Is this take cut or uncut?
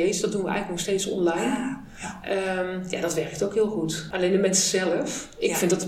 uncut